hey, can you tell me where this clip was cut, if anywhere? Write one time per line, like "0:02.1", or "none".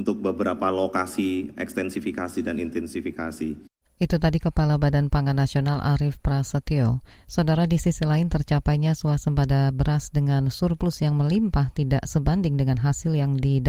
none